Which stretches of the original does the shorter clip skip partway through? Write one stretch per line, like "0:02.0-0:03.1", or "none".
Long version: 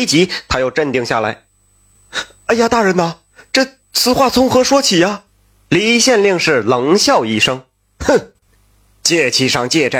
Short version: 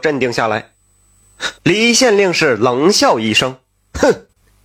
0:02.3-0:05.6